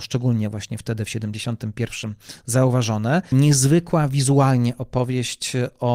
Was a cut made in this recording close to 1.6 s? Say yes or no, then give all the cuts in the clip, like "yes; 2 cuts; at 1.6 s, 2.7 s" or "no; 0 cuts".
no; 1 cut; at 3.3 s